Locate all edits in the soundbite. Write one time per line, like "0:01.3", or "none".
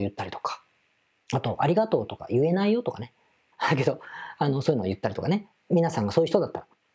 0:03.5